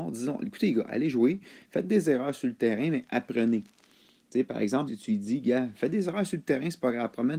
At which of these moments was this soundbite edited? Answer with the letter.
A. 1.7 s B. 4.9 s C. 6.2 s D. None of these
B